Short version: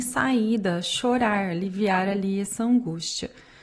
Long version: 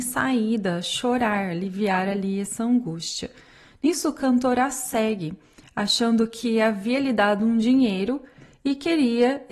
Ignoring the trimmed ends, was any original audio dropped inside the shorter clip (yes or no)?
no